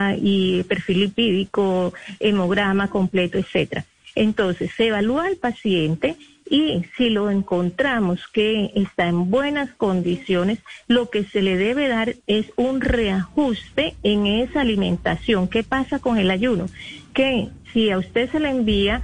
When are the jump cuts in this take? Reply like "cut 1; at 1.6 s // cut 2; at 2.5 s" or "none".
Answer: none